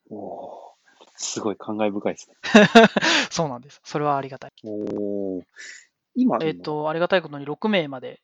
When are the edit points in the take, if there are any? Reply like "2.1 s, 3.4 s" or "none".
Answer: 4.5 s, 6.4 s